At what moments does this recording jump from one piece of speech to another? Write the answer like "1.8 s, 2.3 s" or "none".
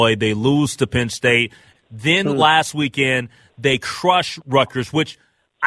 1.7 s